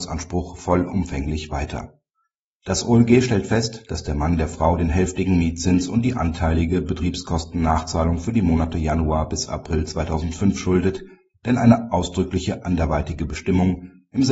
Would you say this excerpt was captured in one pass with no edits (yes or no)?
yes